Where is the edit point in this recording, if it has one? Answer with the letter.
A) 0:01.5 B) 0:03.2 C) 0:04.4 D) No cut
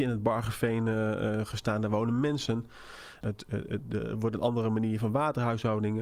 B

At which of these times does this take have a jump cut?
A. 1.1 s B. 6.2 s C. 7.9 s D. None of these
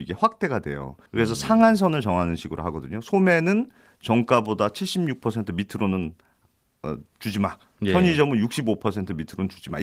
A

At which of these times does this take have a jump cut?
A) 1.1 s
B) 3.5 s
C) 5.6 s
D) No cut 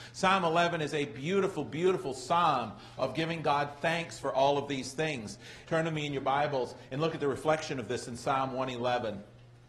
C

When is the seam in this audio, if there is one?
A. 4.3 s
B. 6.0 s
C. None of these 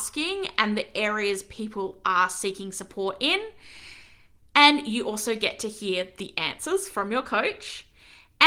C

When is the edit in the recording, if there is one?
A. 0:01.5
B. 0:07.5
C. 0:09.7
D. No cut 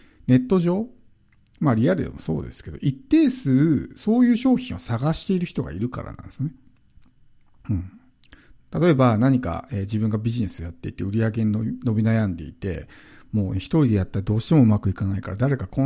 D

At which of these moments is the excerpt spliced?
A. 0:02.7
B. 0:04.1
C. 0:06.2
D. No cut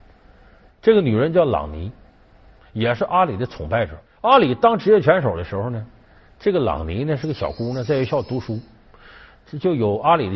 B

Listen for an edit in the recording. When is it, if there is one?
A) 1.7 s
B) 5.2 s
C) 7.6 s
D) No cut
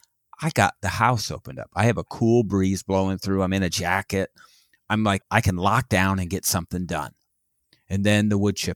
B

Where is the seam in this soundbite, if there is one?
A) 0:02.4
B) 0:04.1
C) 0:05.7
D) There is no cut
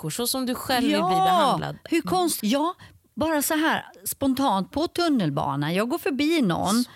A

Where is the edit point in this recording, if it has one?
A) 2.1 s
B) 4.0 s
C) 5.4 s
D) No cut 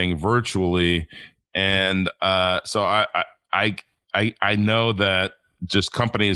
D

